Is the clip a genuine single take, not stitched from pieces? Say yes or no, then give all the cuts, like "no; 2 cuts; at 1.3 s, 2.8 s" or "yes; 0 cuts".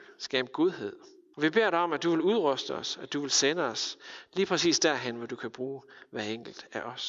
no; 1 cut; at 1.3 s